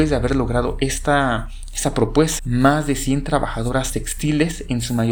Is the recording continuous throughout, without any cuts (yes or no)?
no